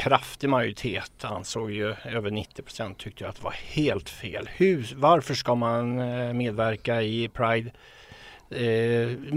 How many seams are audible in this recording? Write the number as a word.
zero